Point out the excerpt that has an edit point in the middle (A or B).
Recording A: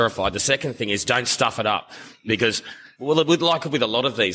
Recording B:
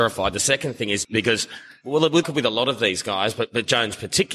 B